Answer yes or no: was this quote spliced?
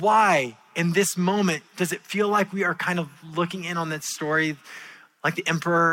no